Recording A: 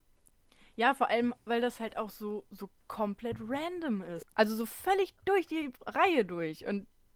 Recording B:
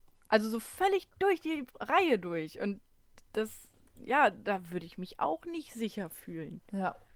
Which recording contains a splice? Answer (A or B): A